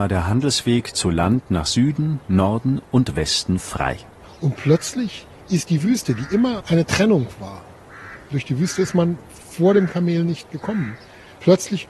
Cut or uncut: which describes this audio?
uncut